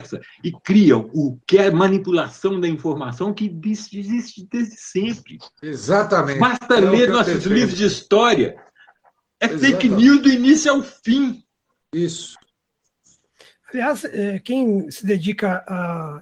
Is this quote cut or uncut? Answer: cut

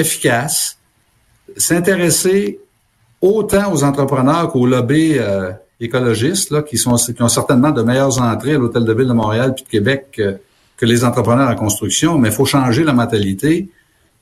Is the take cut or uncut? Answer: uncut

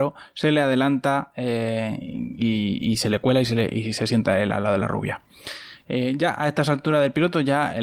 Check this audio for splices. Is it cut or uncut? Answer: uncut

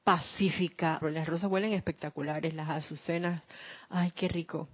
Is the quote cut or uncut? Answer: cut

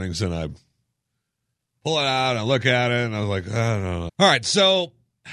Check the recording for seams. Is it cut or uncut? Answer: cut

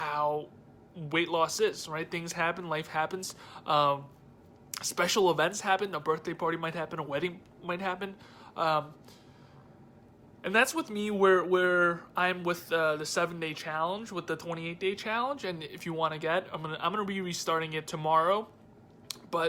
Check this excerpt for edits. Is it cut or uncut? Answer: uncut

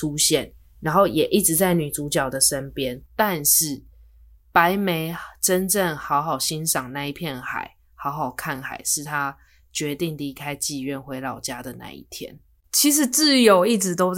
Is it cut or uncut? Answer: uncut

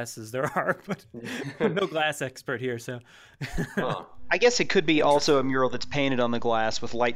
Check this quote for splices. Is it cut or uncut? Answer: uncut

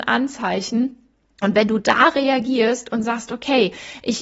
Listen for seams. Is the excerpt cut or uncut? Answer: uncut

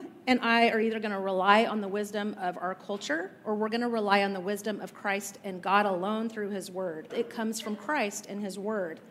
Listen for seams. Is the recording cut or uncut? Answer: cut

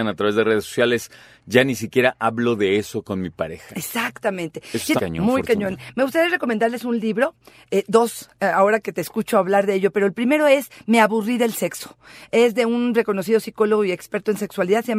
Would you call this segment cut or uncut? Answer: cut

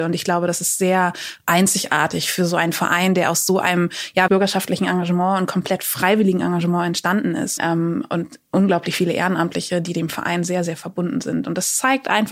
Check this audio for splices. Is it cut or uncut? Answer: cut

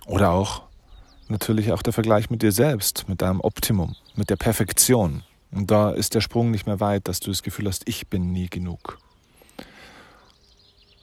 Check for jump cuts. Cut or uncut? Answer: cut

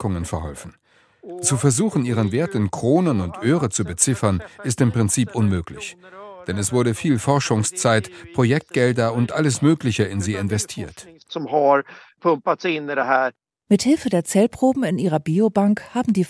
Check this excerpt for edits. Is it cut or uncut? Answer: uncut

